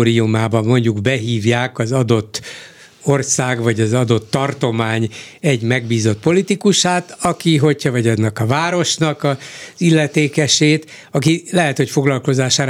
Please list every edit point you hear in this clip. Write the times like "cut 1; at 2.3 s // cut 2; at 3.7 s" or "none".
none